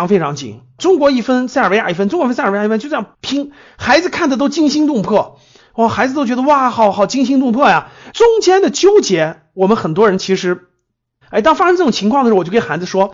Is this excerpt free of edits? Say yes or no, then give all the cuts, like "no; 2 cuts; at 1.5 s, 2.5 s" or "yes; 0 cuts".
no; 2 cuts; at 8.1 s, 11.2 s